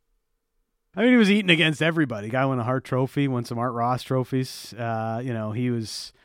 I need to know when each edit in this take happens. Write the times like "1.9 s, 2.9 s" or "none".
0.9 s